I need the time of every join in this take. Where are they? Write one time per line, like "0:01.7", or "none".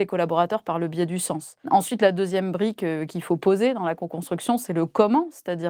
none